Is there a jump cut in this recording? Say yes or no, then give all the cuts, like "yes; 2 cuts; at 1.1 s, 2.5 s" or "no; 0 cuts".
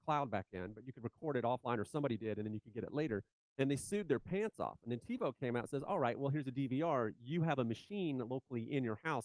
no; 0 cuts